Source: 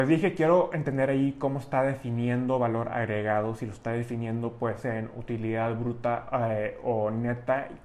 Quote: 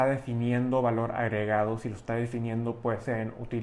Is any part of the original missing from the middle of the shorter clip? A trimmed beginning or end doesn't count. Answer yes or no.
no